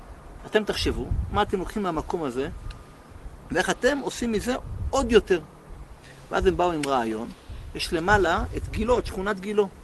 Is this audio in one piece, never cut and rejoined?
yes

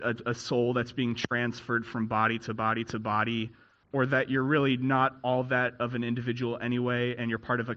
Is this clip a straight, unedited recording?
no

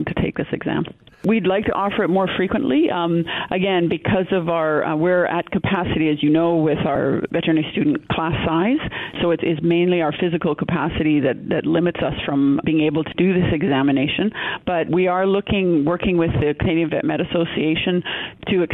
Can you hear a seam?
no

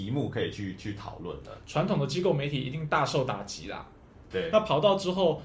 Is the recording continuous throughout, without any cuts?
no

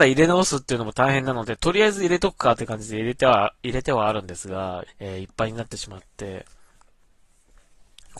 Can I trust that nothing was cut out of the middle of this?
no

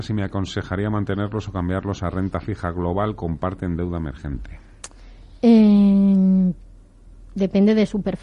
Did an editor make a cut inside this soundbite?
no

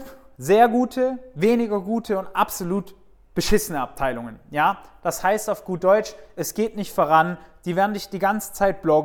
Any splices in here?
no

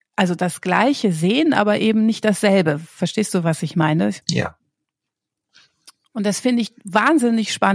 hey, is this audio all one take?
yes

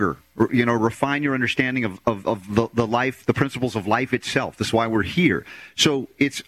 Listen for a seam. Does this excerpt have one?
no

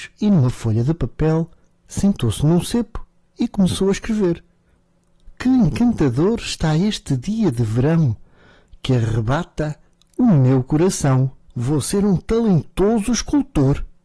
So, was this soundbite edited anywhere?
yes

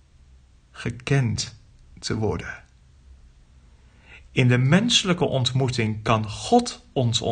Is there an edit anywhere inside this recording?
no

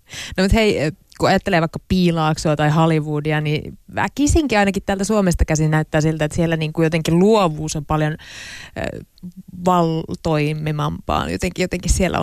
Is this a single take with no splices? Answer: yes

